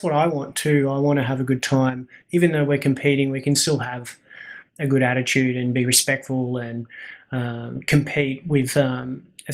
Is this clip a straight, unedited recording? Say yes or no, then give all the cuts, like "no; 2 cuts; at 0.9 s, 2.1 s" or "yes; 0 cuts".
yes; 0 cuts